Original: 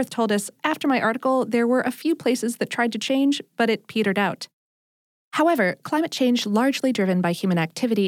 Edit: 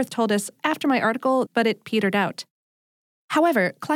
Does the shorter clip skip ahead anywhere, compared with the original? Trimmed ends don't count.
yes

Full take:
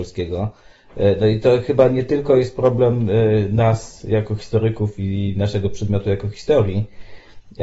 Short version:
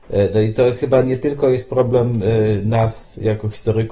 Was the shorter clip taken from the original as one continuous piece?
yes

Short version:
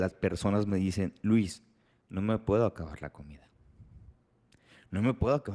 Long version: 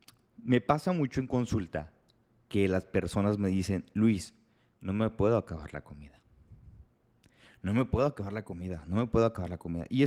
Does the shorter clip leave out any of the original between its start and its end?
no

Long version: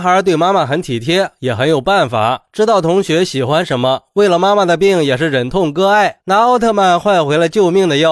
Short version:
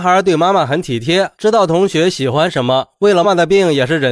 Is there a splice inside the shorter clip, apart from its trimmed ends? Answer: yes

